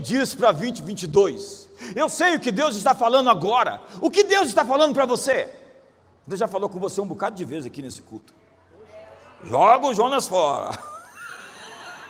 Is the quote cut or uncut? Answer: uncut